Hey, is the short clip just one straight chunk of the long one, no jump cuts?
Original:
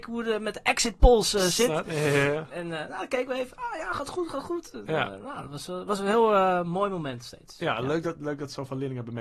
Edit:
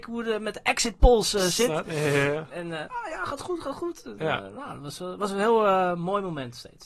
no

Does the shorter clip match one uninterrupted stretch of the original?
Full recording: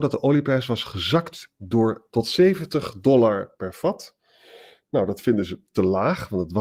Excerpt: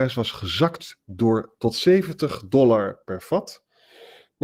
yes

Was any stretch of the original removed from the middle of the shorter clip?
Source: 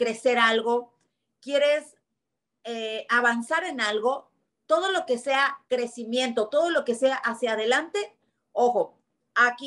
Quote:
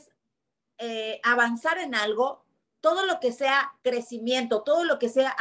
no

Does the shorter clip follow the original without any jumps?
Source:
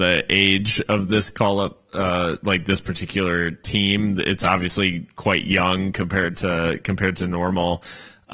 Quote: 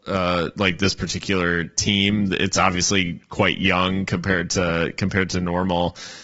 yes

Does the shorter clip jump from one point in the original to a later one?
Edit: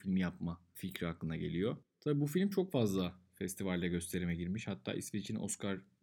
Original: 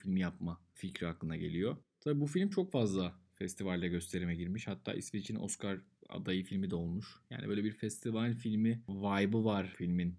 no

